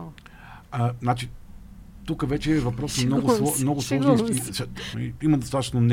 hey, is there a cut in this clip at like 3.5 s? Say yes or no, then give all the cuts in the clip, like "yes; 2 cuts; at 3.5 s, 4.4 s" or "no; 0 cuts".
no; 2 cuts; at 2.0 s, 4.9 s